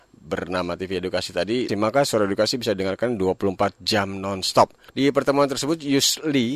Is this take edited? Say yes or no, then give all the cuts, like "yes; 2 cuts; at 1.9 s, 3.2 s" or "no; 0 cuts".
yes; 2 cuts; at 1.7 s, 4.9 s